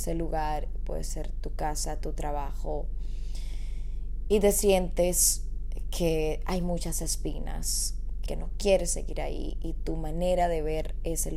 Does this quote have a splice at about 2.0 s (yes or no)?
no